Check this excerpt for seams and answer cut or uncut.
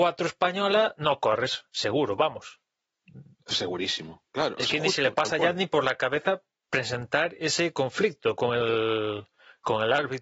uncut